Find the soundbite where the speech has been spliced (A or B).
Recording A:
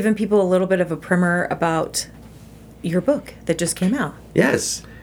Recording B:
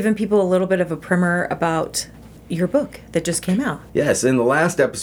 B